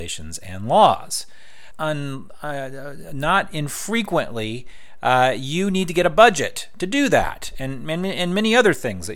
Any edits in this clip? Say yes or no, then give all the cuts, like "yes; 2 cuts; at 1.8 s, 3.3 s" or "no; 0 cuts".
yes; 1 cut; at 1.7 s